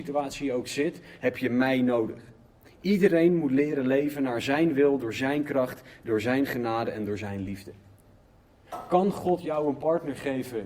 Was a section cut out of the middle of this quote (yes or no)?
no